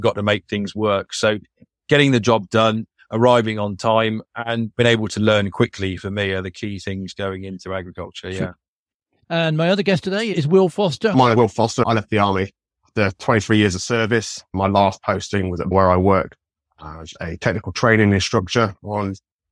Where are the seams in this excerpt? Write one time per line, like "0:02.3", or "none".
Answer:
none